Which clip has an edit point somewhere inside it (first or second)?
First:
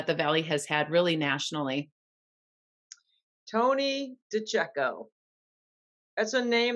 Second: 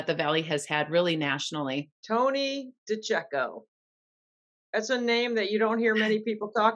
second